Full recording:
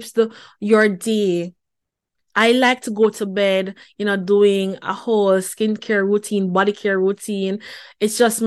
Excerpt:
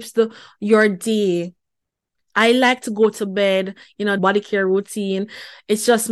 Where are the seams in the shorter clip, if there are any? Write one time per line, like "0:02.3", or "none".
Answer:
0:04.2